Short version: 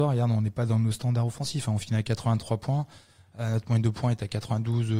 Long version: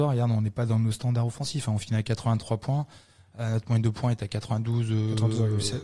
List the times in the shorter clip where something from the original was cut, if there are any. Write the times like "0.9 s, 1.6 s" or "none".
none